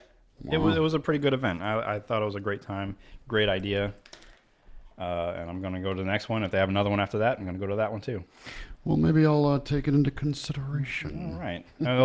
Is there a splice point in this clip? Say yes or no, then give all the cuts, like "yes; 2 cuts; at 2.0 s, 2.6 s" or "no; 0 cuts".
no; 0 cuts